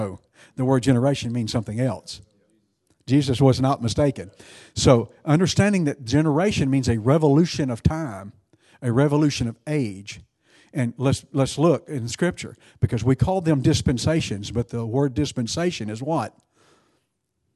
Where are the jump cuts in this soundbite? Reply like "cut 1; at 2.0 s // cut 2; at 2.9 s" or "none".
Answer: none